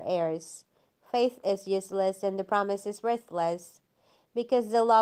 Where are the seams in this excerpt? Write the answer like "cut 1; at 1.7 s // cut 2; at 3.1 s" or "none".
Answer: none